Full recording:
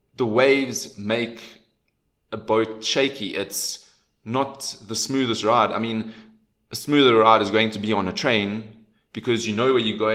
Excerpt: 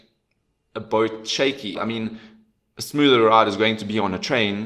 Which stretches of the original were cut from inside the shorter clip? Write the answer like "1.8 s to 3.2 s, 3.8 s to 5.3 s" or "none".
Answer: 3.3 s to 5.7 s